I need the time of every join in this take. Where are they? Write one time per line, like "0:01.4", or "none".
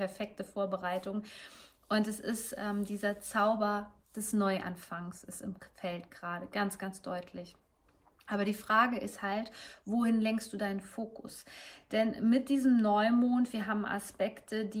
none